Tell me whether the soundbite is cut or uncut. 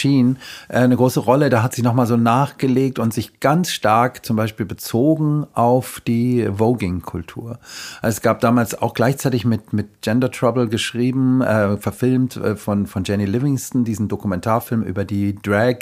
uncut